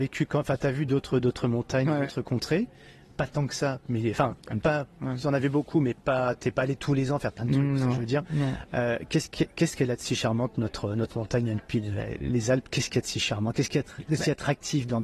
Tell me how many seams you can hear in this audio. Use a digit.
0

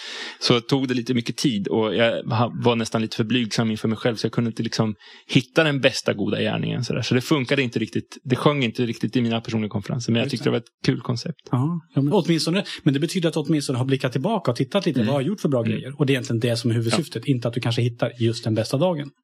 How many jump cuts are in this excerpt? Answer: 1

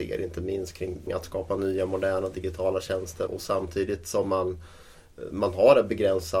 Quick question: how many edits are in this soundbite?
2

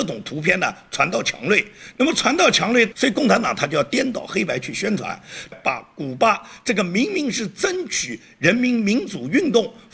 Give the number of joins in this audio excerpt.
2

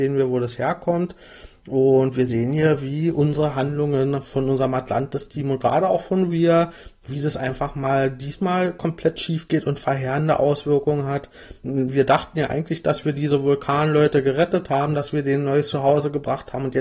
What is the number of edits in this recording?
0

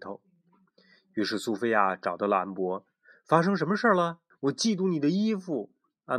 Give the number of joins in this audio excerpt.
1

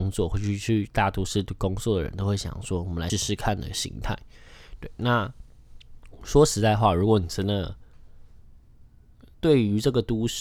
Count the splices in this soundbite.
2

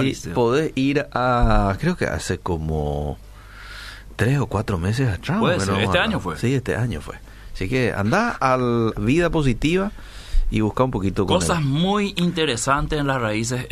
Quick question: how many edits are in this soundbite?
1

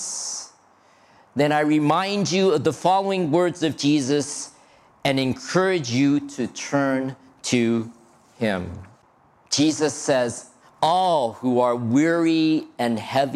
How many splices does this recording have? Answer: 1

